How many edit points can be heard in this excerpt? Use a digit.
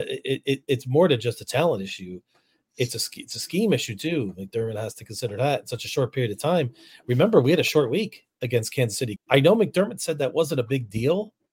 1